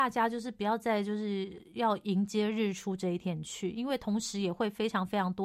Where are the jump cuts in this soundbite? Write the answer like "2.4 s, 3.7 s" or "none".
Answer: none